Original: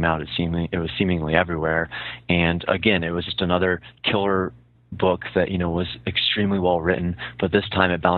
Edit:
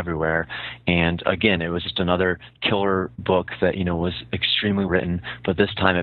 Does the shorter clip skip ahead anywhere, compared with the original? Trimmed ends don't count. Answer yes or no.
yes